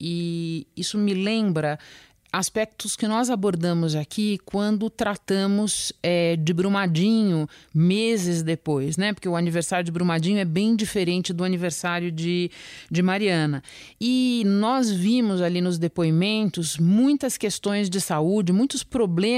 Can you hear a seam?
no; 0 cuts

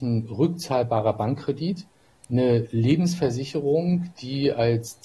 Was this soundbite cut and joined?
no; 0 cuts

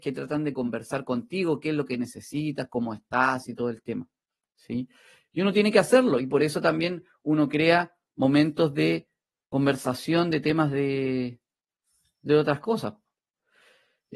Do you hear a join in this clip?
no; 0 cuts

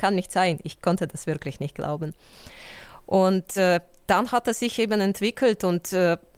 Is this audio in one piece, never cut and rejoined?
yes; 0 cuts

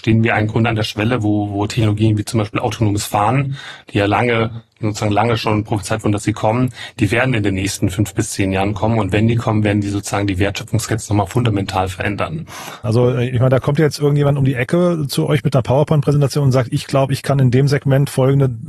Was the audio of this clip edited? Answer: yes; 1 cut; at 12.8 s

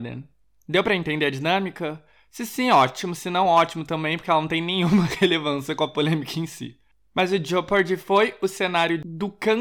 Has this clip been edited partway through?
no; 0 cuts

